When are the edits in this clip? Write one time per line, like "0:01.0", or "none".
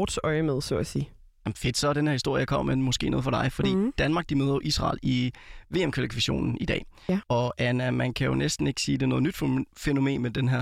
0:07.2